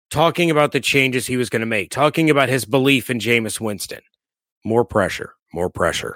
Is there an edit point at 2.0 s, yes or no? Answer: no